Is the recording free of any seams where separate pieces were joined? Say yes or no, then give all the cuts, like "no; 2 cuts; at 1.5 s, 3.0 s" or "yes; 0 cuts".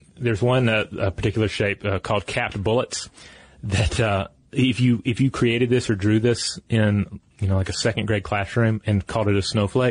yes; 0 cuts